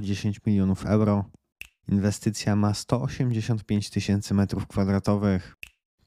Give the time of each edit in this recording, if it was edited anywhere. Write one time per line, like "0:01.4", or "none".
0:01.8